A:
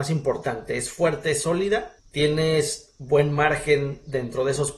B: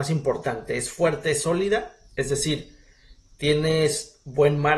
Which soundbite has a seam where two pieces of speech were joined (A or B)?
A